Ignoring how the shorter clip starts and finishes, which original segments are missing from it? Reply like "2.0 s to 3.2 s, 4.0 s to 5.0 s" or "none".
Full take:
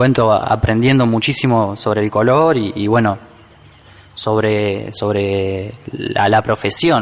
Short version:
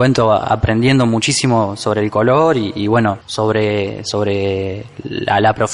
3.2 s to 4.1 s